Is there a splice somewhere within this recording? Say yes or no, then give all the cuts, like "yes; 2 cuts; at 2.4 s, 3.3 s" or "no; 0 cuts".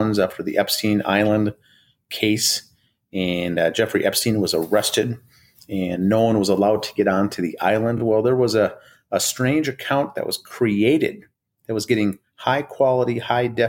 no; 0 cuts